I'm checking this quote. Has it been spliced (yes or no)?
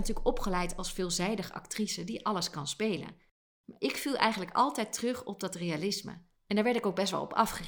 no